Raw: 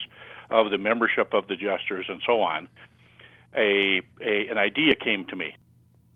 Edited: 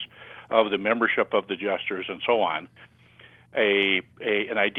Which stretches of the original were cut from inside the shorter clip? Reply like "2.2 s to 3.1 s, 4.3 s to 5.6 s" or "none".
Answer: none